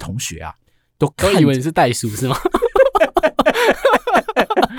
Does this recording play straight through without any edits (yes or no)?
yes